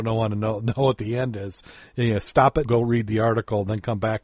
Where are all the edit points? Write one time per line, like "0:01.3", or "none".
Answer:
0:02.6